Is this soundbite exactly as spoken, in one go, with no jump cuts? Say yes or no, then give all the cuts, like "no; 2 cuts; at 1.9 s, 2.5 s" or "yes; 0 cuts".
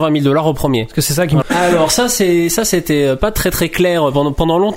no; 1 cut; at 1.4 s